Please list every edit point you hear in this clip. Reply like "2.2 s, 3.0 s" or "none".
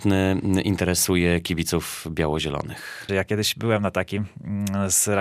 3.1 s